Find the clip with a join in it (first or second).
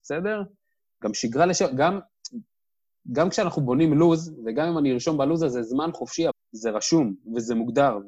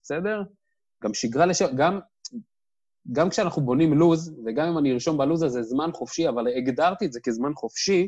first